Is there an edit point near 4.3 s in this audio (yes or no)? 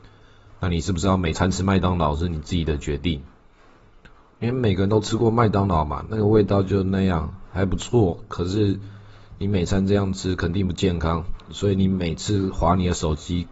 yes